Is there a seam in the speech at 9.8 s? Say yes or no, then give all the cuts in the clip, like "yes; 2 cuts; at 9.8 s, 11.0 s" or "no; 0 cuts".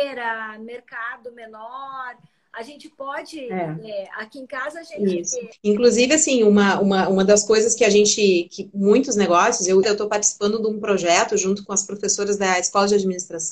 yes; 2 cuts; at 5.5 s, 9.8 s